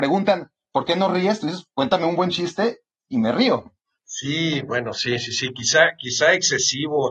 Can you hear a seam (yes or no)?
no